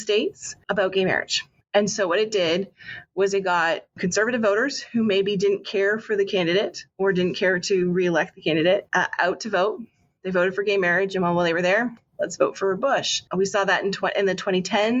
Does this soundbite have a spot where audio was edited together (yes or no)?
no